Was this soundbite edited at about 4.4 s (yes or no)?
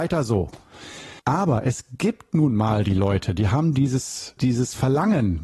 yes